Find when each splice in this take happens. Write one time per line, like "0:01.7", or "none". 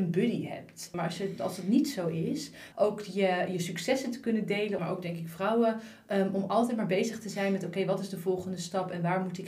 0:00.9
0:02.7
0:04.8